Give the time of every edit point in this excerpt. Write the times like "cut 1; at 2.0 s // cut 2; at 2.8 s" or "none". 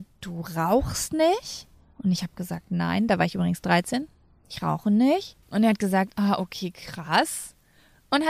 cut 1; at 5.4 s